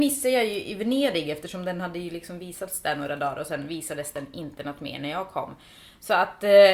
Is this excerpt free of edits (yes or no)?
yes